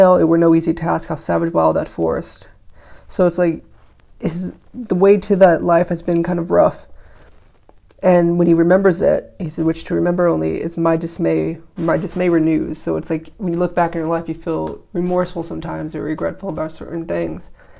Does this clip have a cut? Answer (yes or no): no